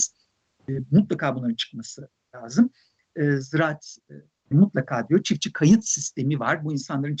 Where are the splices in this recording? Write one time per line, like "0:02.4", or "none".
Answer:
0:04.5